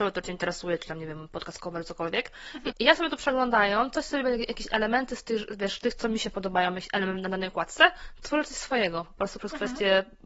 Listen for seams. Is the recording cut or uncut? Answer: cut